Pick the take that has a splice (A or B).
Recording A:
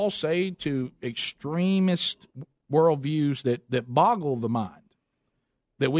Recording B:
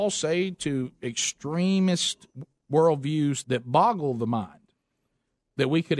B